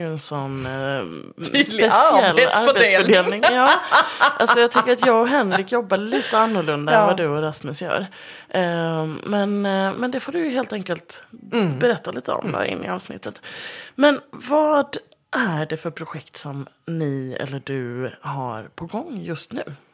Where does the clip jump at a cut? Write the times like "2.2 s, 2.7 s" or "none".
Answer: none